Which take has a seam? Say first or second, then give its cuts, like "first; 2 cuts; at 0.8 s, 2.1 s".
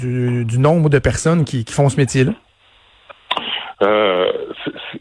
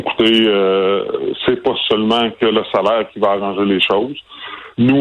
first; 1 cut; at 3.7 s